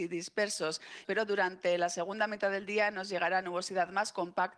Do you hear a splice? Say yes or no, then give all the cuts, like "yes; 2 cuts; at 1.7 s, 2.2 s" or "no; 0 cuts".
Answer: yes; 1 cut; at 1.0 s